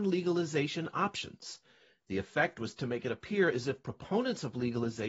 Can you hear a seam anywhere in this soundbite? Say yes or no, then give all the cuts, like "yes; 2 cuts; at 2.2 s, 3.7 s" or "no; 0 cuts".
no; 0 cuts